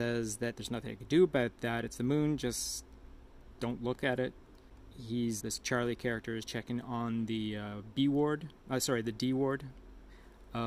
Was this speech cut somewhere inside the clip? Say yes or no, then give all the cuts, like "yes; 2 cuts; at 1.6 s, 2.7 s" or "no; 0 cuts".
yes; 1 cut; at 5.4 s